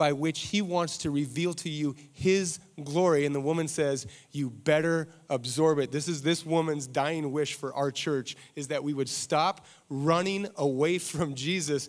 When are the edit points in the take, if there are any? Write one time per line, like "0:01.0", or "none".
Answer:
none